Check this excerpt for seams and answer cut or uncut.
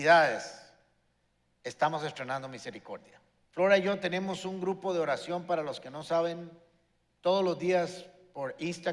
cut